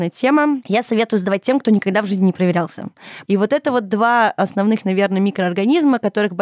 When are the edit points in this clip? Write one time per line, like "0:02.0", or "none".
0:03.2